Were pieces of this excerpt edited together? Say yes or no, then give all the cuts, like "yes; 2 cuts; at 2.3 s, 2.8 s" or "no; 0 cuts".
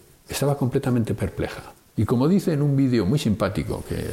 yes; 1 cut; at 2.0 s